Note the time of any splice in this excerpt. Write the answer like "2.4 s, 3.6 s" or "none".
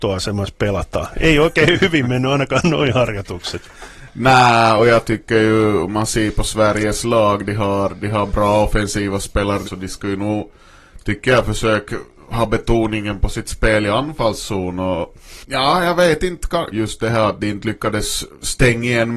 9.6 s, 16.7 s

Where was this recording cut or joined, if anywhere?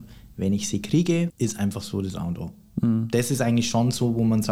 1.3 s

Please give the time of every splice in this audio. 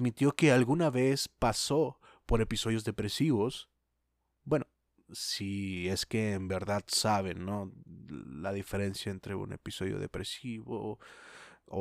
none

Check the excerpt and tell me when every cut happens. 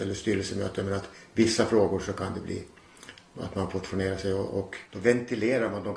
4.8 s

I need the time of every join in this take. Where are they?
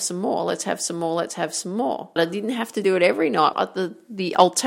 2.2 s, 3.5 s

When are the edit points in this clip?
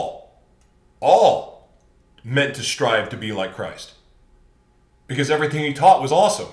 none

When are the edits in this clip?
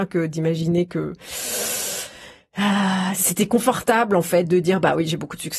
3.1 s

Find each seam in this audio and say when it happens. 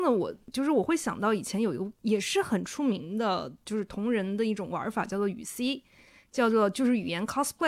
none

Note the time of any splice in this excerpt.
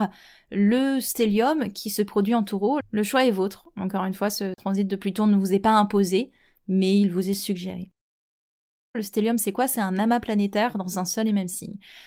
2.8 s, 8.9 s

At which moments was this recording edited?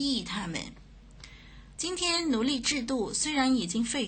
1.8 s

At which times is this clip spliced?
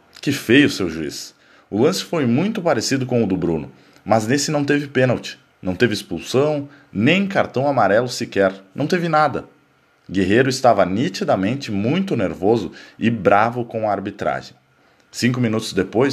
none

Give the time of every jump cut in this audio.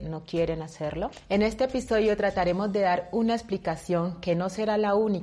none

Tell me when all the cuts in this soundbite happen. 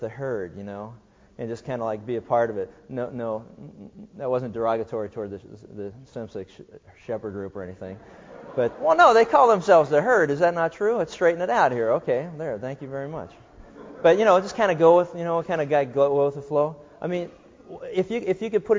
8.7 s

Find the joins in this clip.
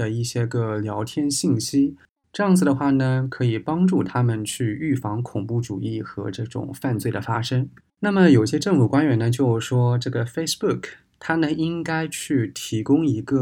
7.9 s

